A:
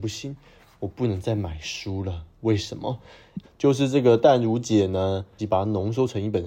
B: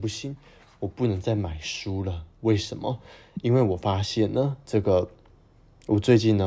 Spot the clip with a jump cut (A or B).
A